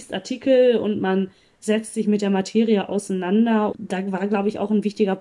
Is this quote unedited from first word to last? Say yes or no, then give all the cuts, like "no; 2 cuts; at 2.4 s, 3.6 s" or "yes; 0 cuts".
no; 1 cut; at 3.7 s